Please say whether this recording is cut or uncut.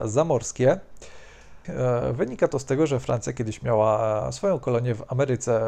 cut